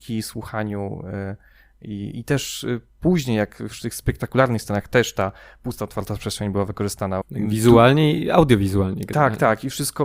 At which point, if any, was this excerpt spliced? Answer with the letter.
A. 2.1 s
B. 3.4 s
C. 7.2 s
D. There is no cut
C